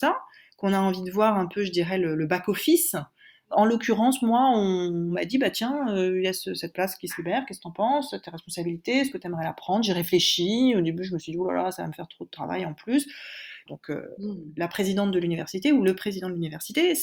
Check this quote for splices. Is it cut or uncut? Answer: cut